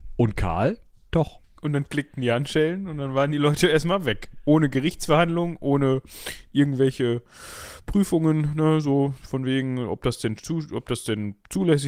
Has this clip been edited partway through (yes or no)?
no